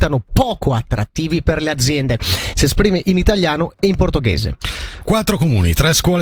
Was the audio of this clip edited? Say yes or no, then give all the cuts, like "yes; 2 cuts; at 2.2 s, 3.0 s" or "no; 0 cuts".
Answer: yes; 2 cuts; at 2.2 s, 5.0 s